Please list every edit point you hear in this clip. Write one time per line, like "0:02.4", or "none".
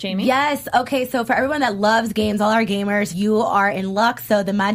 0:03.1